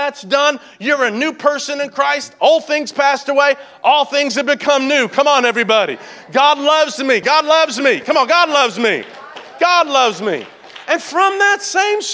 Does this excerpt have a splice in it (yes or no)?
yes